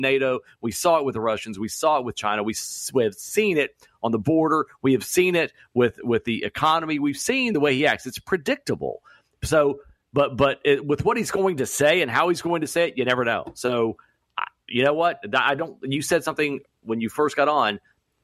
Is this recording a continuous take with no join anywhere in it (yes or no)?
yes